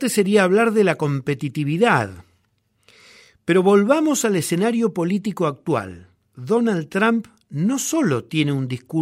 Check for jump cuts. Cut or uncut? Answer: uncut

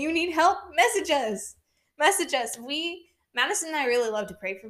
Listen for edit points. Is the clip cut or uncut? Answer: uncut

